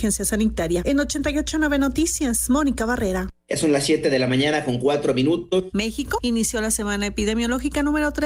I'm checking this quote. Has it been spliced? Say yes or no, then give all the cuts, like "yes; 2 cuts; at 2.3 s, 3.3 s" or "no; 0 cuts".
yes; 2 cuts; at 3.4 s, 5.7 s